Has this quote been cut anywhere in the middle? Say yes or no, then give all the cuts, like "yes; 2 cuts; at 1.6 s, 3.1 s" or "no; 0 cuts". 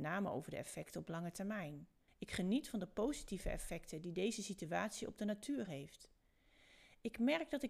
yes; 1 cut; at 2.1 s